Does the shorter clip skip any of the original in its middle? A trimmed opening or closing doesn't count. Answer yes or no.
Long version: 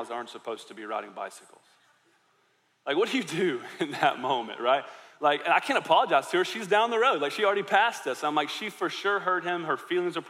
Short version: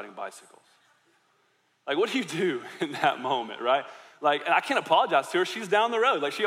no